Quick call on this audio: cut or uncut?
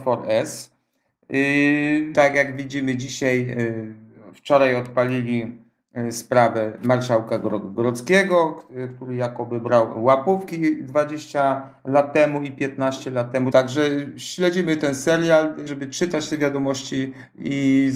cut